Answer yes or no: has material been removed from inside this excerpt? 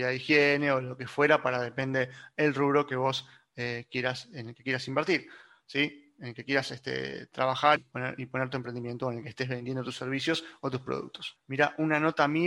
yes